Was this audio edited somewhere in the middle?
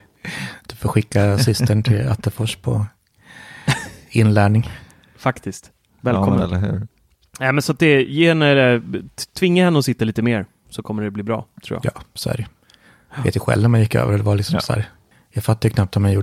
no; 0 cuts

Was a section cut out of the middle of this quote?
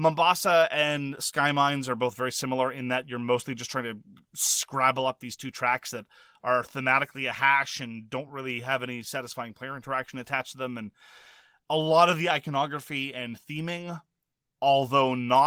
no; 0 cuts

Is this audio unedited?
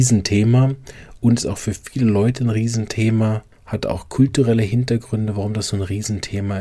no; 1 cut; at 3.5 s

